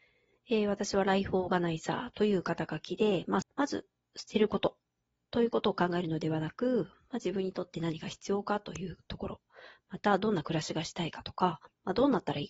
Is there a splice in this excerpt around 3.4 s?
yes; 1 cut; at 3.4 s

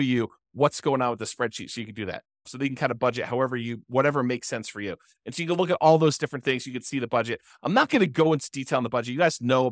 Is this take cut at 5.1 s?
no; 1 cut; at 2.5 s

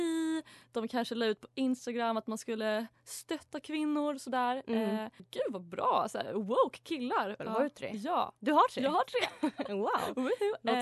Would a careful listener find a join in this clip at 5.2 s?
yes; 2 cuts; at 5.2 s, 7.4 s

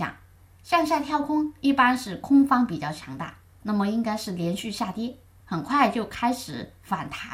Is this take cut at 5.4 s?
yes; 1 cut; at 5.4 s

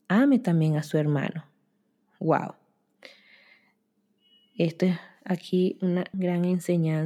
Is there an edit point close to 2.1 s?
no; 1 cut; at 6.1 s

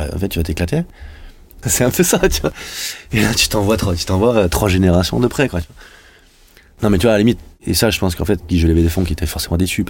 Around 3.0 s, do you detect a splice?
no; 2 cuts; at 1.6 s, 8.4 s

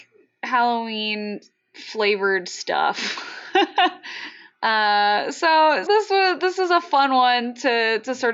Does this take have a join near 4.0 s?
no; 1 cut; at 5.9 s

